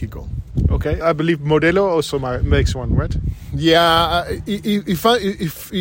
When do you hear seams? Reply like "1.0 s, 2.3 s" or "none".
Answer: 1.0 s

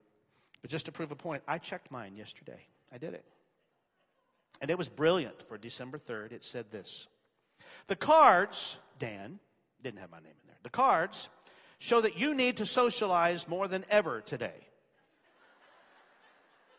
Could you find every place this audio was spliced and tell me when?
none

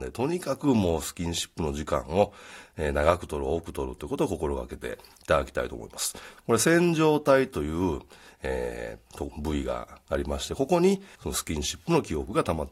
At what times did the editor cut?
6.4 s, 8.4 s, 11.2 s

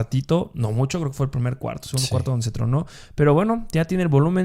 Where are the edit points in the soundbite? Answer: none

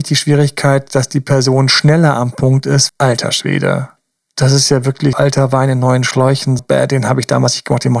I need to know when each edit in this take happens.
2.9 s, 5.1 s, 6.6 s

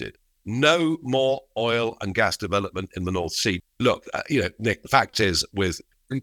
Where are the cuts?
3.6 s

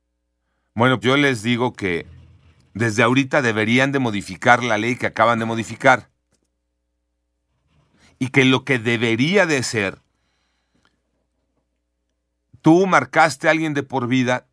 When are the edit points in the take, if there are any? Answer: 1.0 s

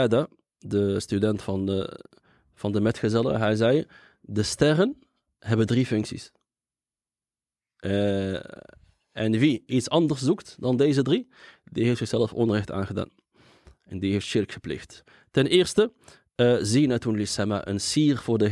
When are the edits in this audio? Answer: none

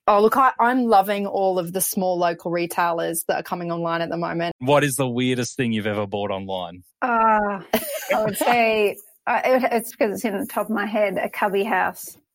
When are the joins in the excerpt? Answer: 4.5 s, 6.9 s, 9.9 s

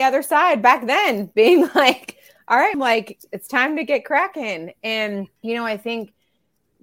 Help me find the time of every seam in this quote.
2.7 s, 5.4 s

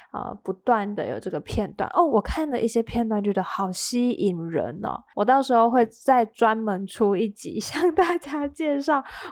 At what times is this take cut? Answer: 5.1 s

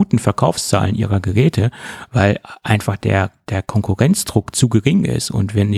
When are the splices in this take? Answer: none

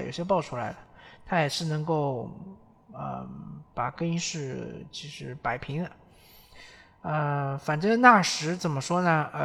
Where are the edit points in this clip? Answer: none

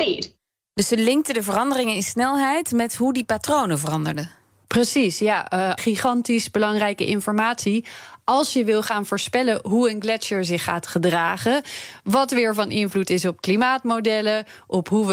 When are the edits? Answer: 5.8 s

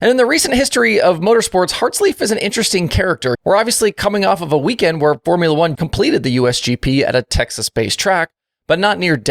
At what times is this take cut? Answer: 3.3 s, 5.7 s

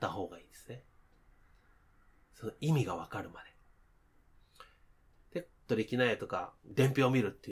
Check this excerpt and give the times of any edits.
5.6 s

